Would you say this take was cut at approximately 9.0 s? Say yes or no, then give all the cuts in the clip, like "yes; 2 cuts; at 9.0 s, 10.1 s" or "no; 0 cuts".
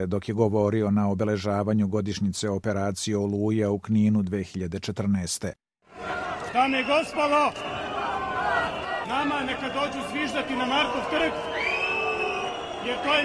yes; 1 cut; at 9.0 s